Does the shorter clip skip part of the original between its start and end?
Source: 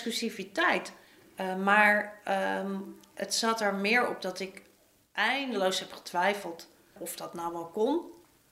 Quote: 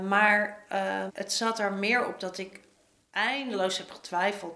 yes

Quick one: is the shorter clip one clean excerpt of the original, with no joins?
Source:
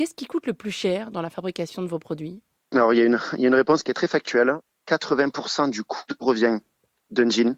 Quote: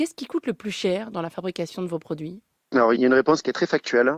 no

